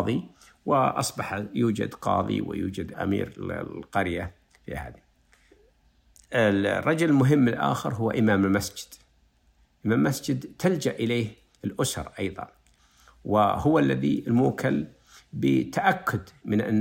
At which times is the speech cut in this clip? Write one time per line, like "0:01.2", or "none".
0:02.9